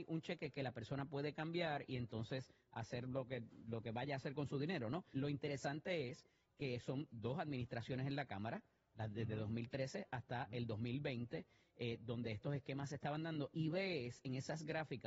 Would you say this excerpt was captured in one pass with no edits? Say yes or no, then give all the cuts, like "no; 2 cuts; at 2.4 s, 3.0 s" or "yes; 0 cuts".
no; 1 cut; at 5.1 s